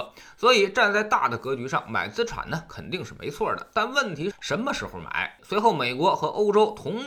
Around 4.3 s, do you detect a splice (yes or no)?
yes